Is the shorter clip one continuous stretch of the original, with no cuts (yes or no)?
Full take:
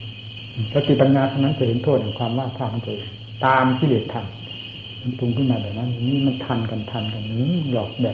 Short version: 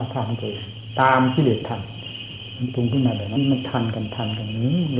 no